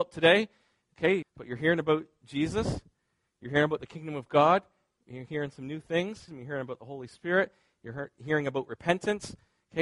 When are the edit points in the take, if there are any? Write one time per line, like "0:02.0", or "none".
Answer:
0:01.2
0:06.3